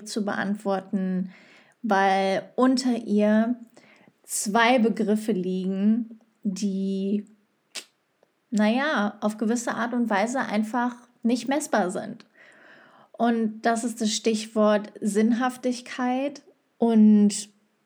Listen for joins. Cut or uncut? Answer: cut